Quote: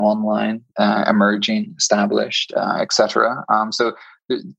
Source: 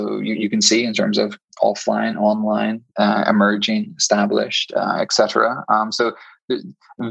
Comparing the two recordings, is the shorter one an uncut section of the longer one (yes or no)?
yes